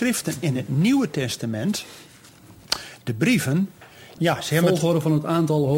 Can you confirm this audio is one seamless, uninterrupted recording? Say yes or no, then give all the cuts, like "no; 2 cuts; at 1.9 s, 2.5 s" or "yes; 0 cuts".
no; 1 cut; at 4.2 s